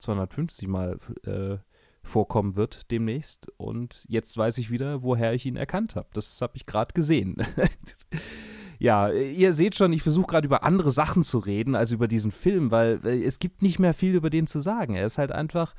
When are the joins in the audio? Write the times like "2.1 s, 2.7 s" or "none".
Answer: none